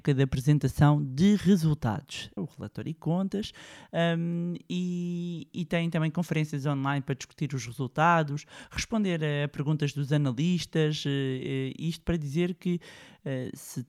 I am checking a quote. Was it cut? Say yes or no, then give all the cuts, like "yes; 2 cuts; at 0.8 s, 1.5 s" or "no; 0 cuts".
yes; 1 cut; at 2.4 s